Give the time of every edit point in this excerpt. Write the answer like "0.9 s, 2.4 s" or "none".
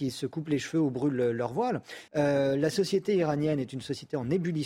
2.1 s